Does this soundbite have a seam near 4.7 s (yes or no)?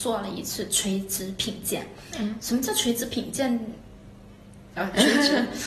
yes